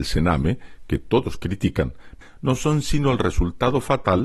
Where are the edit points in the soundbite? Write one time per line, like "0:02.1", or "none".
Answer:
0:02.2

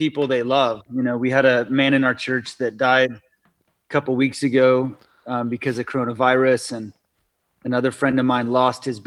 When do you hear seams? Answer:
none

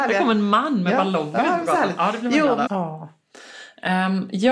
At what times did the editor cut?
0:02.7

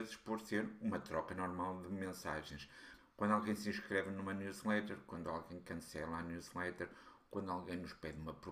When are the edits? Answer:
0:03.0

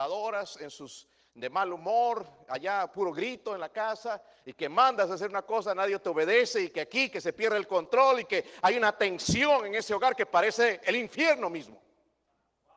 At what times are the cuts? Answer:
none

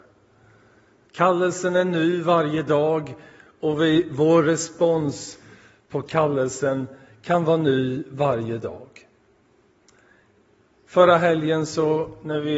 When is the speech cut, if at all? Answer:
0:01.1

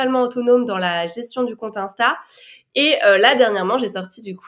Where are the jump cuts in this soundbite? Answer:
none

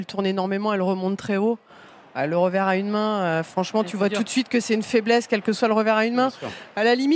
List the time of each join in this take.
none

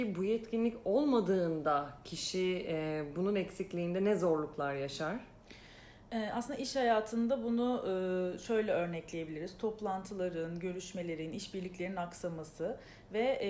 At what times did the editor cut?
none

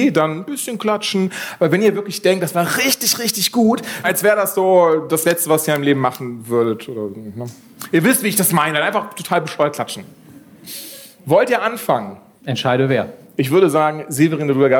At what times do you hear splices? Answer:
0:04.0

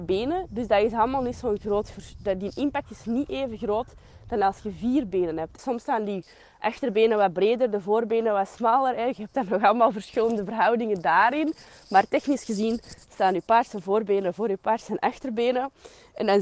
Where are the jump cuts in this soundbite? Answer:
0:05.6

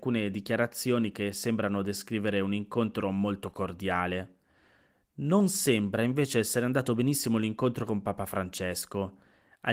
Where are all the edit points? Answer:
none

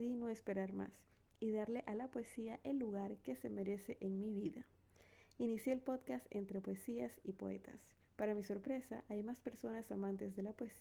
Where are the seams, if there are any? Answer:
0:08.0

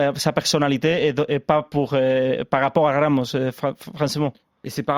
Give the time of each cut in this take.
none

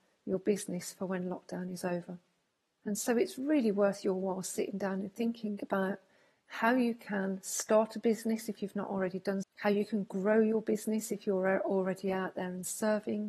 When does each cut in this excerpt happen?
0:02.8
0:09.4

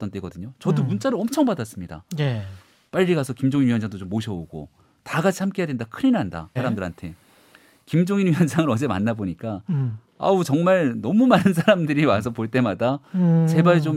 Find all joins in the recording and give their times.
0:06.6

